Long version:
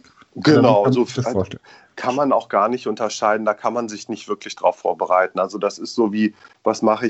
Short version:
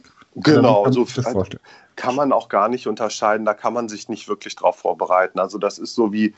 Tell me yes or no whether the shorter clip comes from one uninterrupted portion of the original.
yes